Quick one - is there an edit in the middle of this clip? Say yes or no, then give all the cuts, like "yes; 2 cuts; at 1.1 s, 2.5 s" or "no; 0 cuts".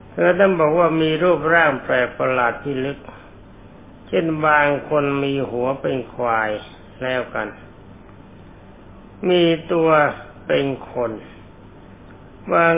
no; 0 cuts